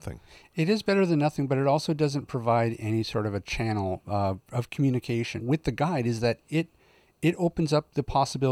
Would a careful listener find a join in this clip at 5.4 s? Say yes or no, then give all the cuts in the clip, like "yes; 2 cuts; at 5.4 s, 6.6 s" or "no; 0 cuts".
yes; 1 cut; at 5.4 s